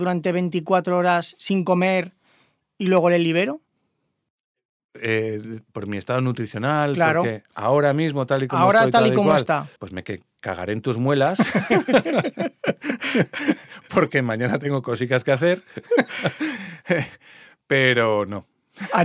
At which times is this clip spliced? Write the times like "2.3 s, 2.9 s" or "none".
9.8 s